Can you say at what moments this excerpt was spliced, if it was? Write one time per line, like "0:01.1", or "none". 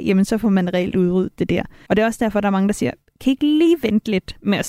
0:01.9